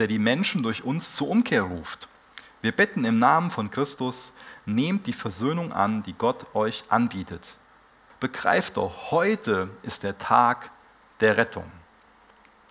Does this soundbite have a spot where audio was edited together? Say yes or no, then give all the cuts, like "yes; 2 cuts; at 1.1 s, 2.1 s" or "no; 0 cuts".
yes; 1 cut; at 8.1 s